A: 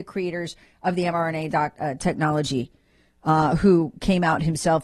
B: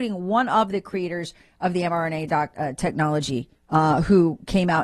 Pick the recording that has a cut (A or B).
B